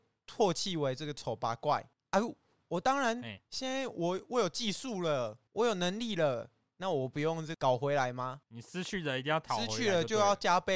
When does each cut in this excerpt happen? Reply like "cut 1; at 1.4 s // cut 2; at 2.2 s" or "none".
none